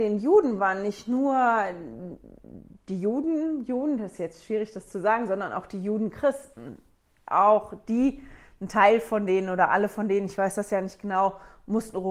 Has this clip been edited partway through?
no; 0 cuts

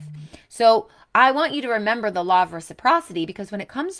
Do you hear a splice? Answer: no; 0 cuts

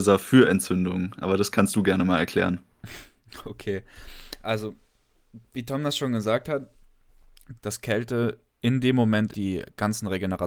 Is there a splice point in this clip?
yes; 2 cuts; at 7.6 s, 9.3 s

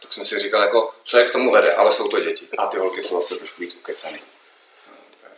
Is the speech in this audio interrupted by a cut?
yes; 1 cut; at 2.5 s

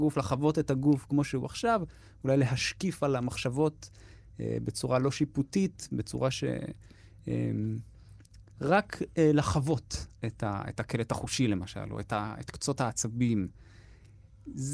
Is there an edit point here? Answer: no; 0 cuts

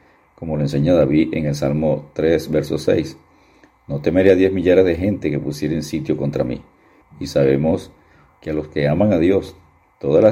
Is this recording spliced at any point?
yes; 1 cut; at 7.0 s

